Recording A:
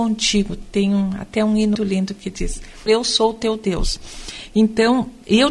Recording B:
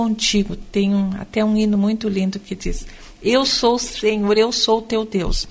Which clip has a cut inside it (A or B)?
A